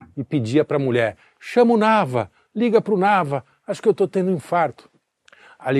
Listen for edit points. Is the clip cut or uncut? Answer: uncut